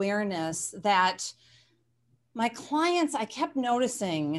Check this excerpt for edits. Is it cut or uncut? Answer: uncut